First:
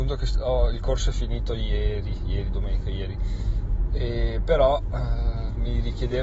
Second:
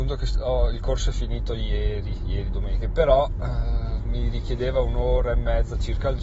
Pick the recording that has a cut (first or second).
second